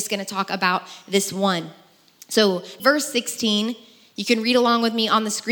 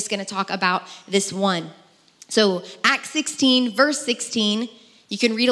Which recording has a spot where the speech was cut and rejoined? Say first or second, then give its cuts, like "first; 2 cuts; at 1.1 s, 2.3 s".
first; 1 cut; at 2.8 s